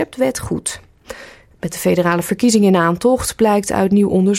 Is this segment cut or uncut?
cut